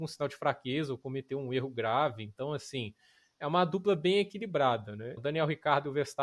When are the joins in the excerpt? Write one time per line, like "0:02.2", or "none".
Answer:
0:05.2

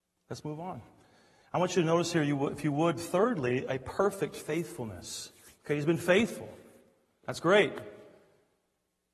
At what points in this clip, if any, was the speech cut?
none

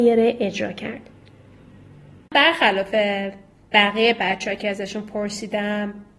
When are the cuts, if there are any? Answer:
0:02.3

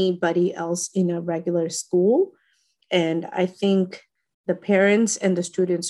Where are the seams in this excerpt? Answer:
none

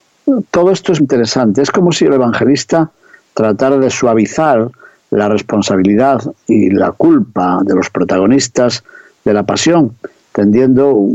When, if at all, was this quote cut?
0:01.0

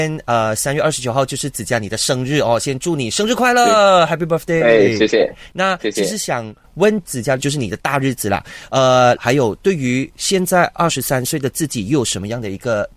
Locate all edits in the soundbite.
0:07.4
0:09.2

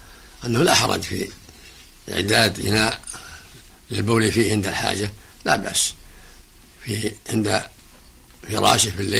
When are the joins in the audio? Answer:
none

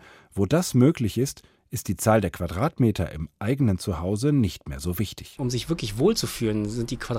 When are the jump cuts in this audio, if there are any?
none

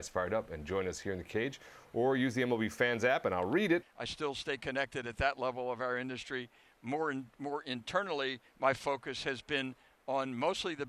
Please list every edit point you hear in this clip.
0:03.8

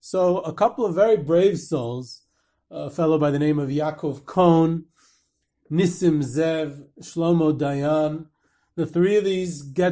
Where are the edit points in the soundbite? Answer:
none

